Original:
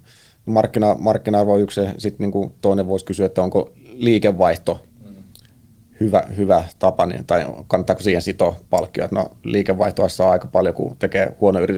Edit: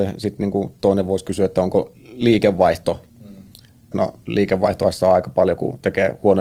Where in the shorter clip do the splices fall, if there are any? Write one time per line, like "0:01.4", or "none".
0:03.9